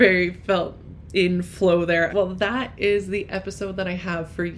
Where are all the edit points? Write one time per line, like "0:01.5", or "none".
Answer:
0:02.1